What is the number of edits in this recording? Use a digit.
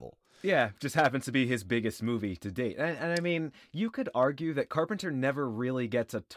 0